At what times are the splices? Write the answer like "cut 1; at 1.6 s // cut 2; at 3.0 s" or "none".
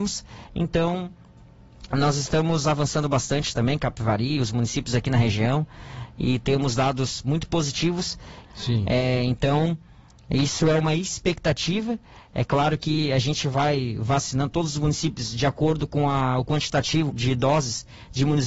cut 1; at 8.4 s // cut 2; at 17.1 s